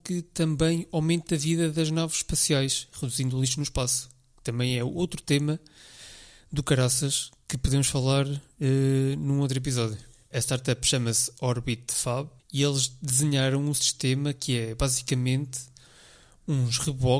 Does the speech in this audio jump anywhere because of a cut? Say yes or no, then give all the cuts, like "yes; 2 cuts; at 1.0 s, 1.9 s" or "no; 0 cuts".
yes; 2 cuts; at 10.3 s, 12.4 s